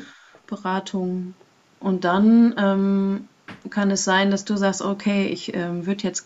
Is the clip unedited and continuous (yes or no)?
yes